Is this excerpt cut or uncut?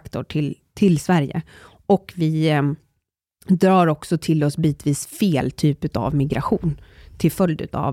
uncut